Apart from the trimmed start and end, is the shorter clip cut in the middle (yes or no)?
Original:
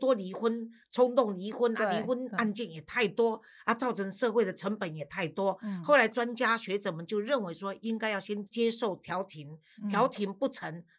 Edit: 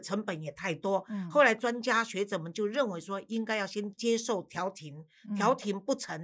no